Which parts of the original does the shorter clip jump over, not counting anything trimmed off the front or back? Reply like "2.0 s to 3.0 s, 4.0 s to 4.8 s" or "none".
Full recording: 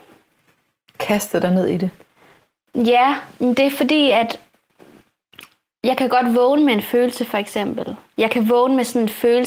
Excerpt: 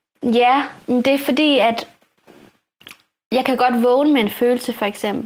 none